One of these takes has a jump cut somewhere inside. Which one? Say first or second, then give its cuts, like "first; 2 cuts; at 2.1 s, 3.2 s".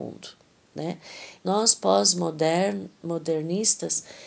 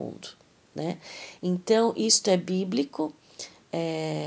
first; 1 cut; at 1.4 s